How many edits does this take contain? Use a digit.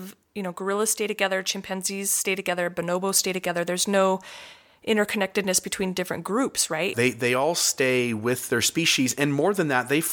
1